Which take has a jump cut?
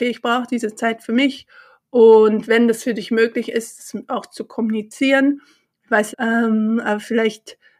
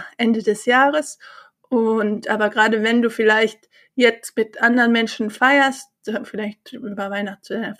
first; 1 cut; at 6.1 s

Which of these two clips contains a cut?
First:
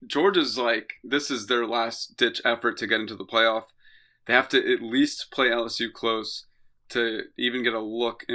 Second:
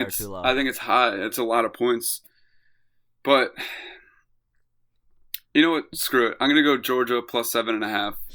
second; 1 cut; at 1.3 s

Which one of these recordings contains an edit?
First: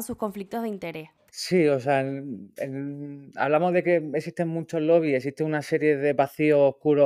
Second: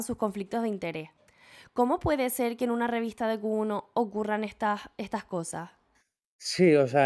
first; 1 cut; at 1.3 s

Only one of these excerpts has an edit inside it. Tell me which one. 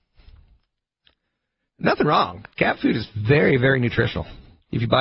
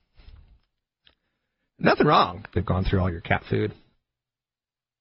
second; 1 cut; at 2.5 s

